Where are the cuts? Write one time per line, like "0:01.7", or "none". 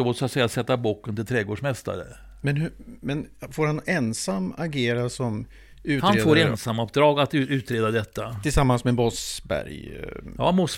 none